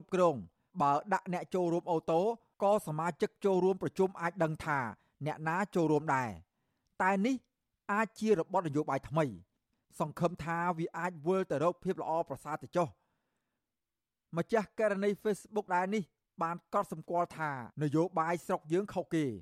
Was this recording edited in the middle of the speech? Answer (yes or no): yes